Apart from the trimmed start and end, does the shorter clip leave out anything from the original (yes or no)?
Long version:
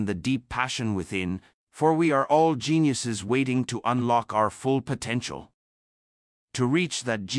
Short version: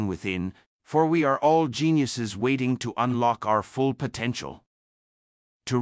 no